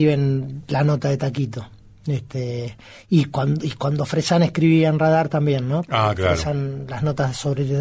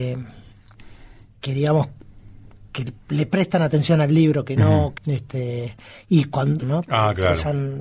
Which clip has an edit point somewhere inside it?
second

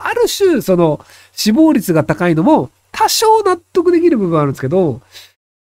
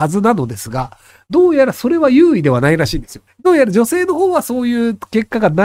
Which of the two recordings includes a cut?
second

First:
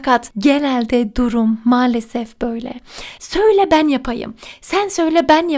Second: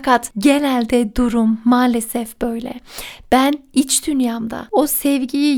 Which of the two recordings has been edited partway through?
first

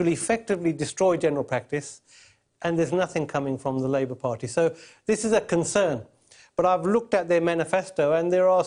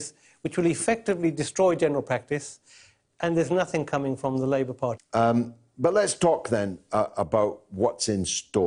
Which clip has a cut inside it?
second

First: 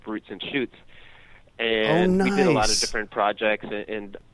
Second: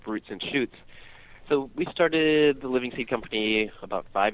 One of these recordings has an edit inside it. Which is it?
second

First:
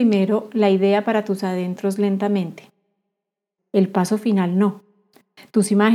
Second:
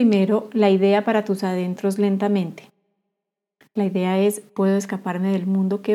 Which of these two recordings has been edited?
first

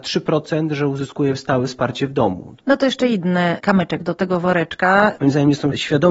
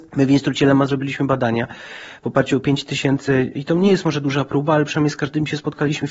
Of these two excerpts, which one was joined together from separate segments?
first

